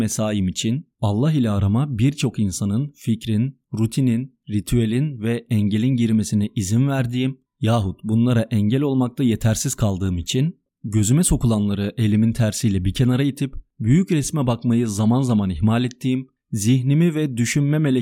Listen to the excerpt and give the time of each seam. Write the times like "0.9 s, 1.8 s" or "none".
none